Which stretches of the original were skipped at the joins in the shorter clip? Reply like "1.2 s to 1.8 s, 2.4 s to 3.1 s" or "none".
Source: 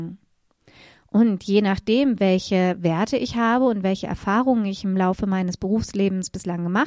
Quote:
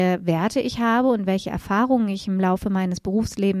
none